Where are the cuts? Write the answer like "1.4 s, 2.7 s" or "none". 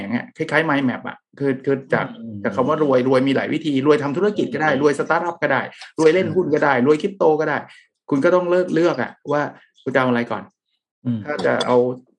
none